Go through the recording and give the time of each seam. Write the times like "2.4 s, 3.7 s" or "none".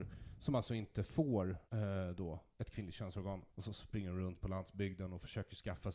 1.7 s, 3.5 s